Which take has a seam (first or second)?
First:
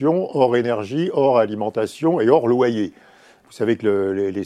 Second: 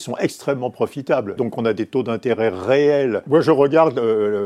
second